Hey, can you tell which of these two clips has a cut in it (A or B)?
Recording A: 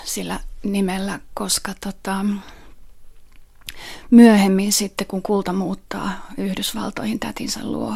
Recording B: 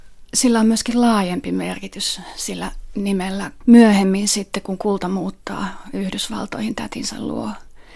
B